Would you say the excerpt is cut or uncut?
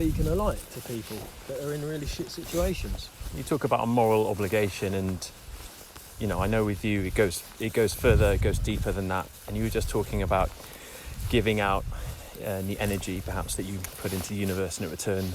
uncut